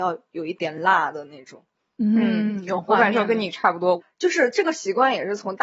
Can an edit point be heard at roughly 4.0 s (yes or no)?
yes